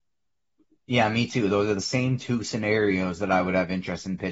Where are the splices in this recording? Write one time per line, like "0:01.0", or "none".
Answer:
none